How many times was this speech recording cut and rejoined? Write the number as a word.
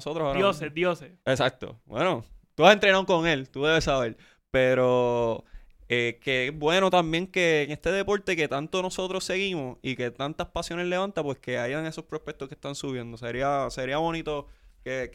one